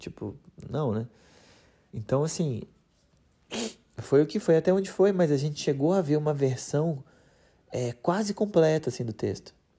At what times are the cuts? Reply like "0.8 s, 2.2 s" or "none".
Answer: 4.4 s

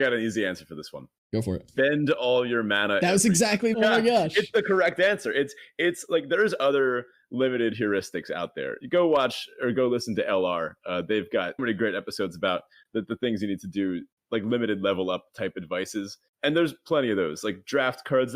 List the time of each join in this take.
3.7 s, 11.6 s

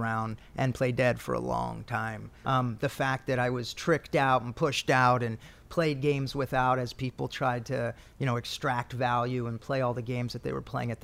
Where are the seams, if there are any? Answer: 2.4 s

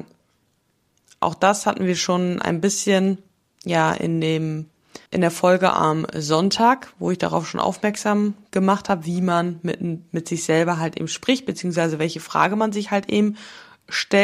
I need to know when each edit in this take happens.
5.1 s

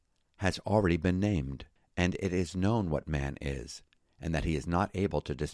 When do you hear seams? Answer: none

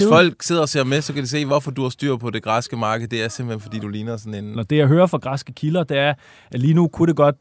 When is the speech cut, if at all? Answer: 4.6 s

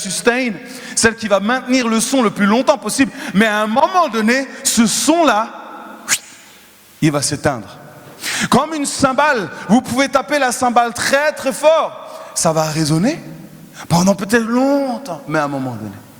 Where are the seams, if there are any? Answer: none

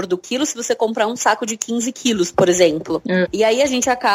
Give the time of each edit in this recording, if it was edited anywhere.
3.2 s

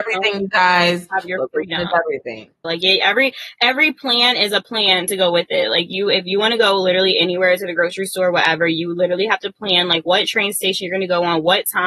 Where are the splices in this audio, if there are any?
2.6 s

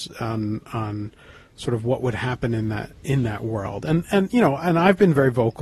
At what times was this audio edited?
none

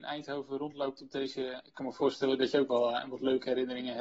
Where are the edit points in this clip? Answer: 1.6 s

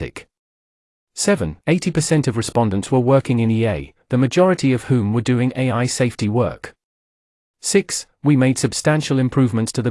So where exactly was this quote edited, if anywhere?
1.6 s

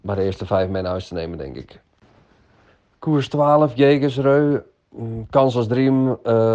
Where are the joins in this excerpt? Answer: none

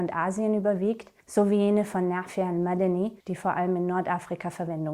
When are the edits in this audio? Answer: 1.2 s, 3.2 s

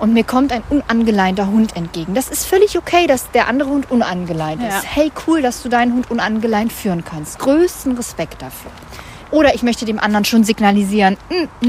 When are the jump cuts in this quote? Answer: 9.3 s

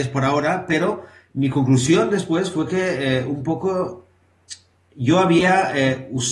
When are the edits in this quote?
none

